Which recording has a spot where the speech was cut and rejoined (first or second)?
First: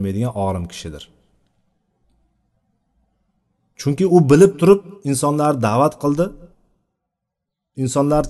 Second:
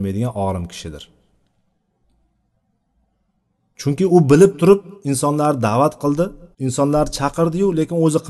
second